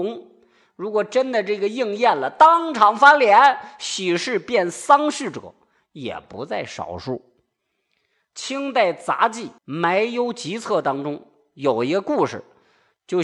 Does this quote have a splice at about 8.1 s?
no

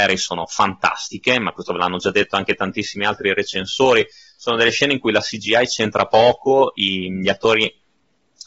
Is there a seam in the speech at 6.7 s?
no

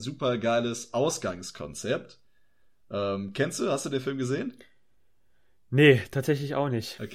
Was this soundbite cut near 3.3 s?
no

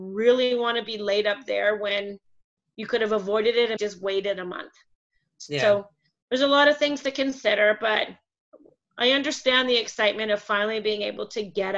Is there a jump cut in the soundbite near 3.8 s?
yes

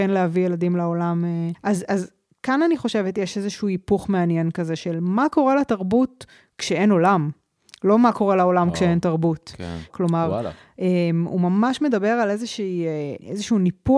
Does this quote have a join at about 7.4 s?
no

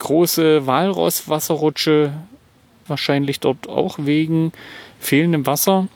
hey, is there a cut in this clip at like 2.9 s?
yes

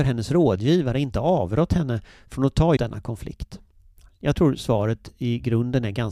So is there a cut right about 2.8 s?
yes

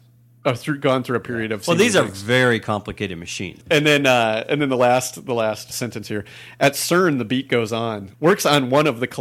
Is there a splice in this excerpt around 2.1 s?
no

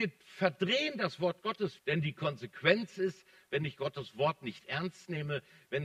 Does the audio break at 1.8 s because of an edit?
yes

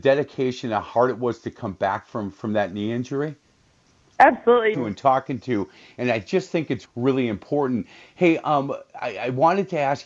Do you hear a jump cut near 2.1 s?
no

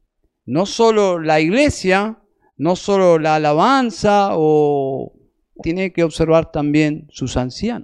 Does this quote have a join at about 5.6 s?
yes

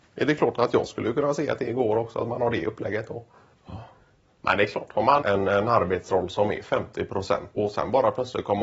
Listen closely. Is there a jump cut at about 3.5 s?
yes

